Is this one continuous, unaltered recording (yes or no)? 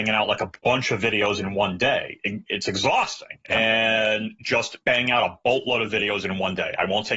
no